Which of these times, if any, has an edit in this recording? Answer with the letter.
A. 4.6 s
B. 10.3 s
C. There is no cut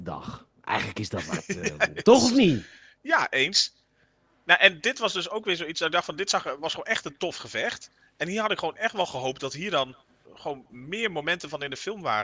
B